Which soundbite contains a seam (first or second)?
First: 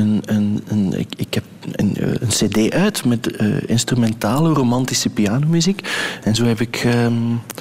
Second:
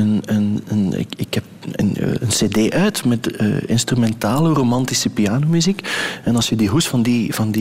first